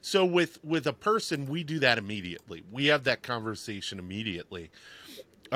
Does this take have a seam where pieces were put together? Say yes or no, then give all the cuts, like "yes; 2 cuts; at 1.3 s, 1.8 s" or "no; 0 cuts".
no; 0 cuts